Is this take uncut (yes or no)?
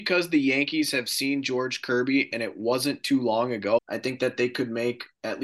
no